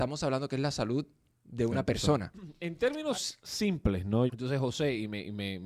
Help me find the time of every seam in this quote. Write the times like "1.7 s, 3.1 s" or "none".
4.3 s